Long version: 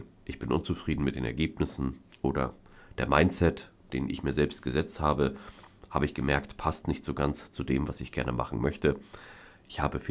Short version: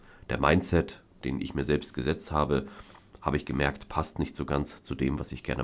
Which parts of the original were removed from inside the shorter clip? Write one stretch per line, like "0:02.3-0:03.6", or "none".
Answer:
none